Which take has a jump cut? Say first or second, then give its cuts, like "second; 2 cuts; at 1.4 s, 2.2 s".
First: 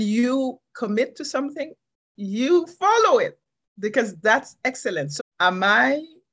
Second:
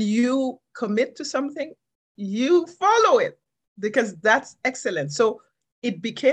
first; 1 cut; at 5.2 s